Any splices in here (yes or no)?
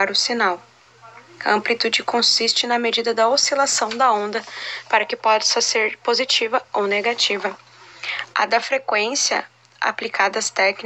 no